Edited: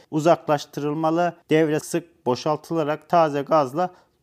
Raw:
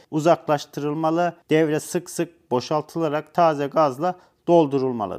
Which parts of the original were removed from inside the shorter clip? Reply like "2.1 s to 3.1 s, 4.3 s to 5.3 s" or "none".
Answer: 1.8 s to 2.1 s